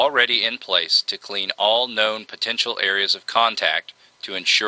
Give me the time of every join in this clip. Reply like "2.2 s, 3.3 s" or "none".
none